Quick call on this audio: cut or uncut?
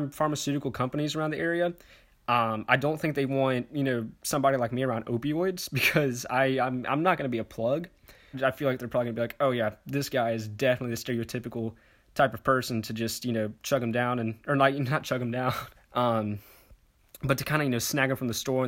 cut